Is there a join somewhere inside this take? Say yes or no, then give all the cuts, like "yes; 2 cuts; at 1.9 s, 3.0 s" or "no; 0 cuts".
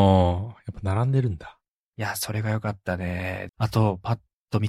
yes; 2 cuts; at 1.8 s, 3.5 s